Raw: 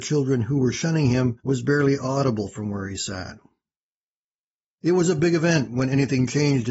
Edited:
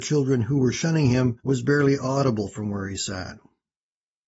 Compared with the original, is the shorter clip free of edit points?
yes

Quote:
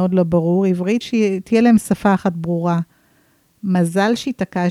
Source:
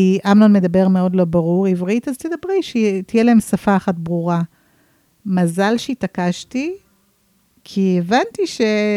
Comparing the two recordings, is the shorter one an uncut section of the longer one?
no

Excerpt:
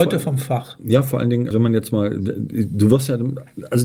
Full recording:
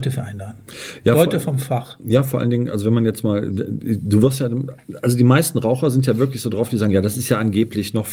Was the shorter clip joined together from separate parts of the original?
yes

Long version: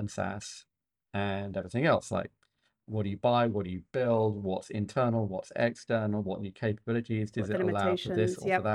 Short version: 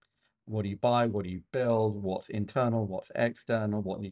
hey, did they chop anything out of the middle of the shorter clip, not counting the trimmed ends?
no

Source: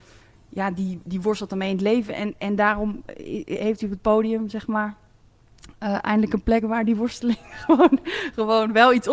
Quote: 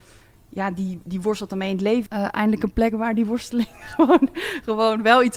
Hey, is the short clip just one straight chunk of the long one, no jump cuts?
no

